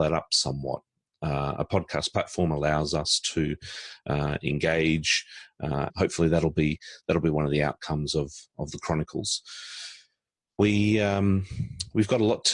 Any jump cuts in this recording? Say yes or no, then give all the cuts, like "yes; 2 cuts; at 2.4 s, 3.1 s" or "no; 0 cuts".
yes; 1 cut; at 5.9 s